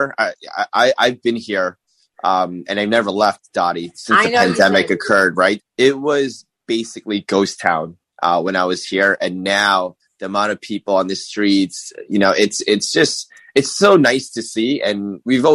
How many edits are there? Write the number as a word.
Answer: one